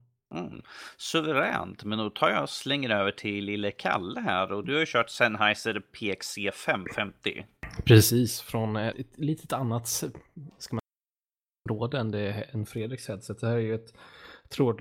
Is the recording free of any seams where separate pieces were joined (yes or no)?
no